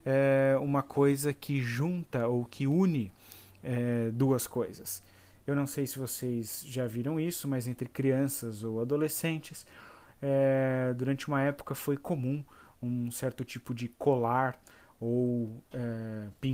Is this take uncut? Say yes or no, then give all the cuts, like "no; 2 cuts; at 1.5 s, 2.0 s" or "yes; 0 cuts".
yes; 0 cuts